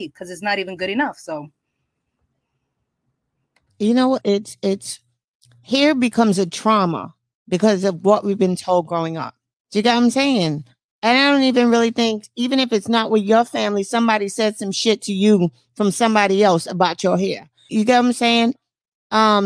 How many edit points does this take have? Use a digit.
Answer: 2